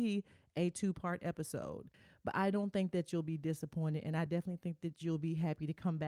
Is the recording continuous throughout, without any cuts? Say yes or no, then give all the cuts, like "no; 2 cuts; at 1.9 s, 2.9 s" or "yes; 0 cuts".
yes; 0 cuts